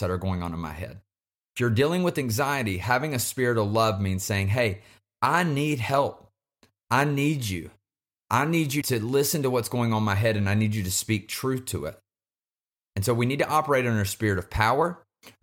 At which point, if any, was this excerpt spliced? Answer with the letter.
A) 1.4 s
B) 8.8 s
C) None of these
B